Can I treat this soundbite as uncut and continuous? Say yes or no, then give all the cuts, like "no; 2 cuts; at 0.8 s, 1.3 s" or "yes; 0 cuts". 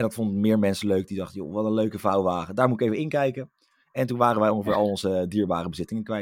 yes; 0 cuts